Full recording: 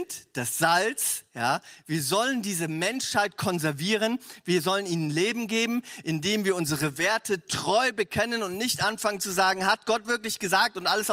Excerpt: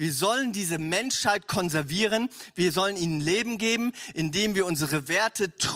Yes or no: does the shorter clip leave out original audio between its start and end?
no